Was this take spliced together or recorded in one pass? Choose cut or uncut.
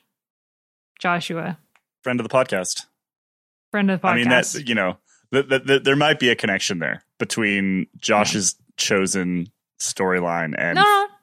uncut